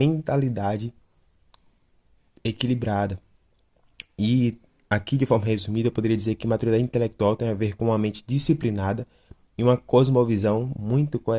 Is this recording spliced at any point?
no; 0 cuts

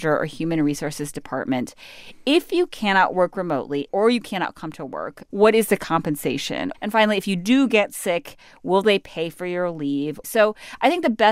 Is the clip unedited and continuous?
no; 2 cuts; at 6.7 s, 10.2 s

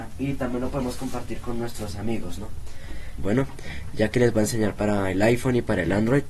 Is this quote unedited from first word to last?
no; 1 cut; at 3.2 s

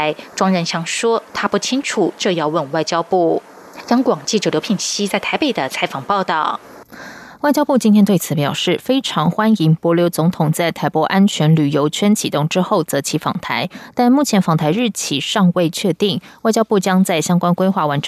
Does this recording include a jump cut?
no; 0 cuts

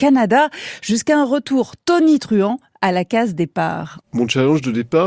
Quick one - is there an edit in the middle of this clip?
yes; 1 cut; at 4.0 s

